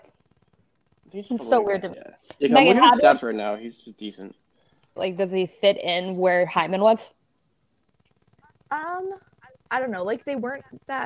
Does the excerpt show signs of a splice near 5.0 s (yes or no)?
yes